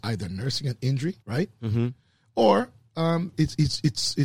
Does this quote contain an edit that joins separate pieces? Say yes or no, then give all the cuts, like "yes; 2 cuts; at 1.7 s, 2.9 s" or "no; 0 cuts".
yes; 2 cuts; at 1.2 s, 3.3 s